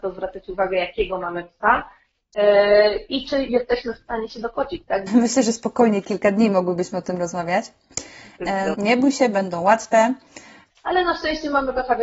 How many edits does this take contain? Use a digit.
3